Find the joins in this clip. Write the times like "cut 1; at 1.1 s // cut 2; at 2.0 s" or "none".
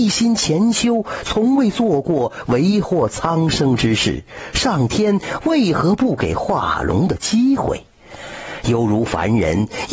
none